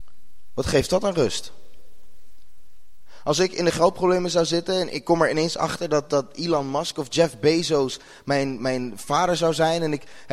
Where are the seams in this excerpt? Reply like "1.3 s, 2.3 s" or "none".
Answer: none